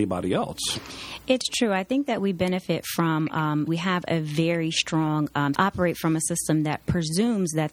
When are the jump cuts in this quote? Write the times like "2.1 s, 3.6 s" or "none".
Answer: 3.7 s, 5.5 s